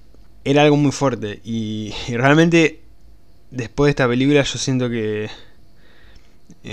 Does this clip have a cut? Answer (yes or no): no